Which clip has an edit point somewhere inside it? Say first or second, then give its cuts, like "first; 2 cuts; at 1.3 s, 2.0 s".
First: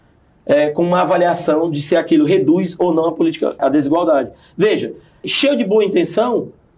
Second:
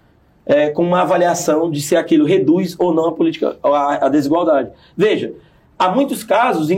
first; 2 cuts; at 3.6 s, 5.2 s